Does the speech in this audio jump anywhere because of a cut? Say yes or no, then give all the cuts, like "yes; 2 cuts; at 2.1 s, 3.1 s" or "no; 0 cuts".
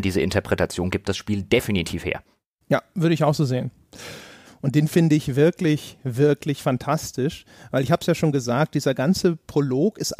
yes; 1 cut; at 4.4 s